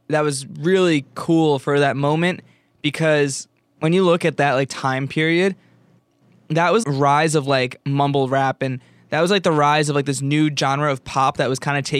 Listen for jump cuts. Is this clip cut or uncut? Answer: cut